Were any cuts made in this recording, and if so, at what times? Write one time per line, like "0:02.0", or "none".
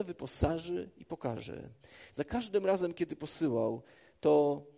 0:02.1